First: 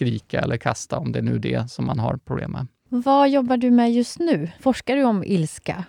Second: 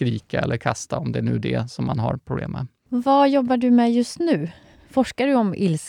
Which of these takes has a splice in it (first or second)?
first